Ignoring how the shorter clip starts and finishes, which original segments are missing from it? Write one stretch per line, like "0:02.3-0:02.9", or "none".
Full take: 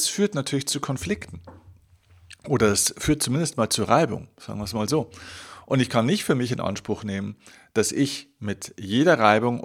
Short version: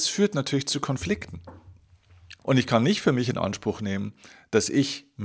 0:02.4-0:05.6